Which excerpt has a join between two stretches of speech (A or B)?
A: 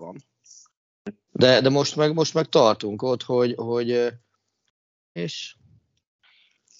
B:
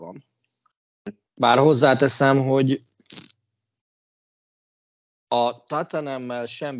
A